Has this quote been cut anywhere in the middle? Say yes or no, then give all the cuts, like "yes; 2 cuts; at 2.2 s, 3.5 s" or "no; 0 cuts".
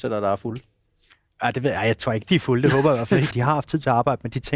yes; 1 cut; at 3.3 s